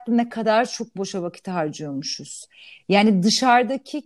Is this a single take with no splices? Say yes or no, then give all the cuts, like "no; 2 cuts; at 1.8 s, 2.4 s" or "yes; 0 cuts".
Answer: yes; 0 cuts